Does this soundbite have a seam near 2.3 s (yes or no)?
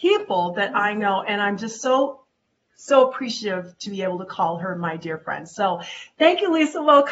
no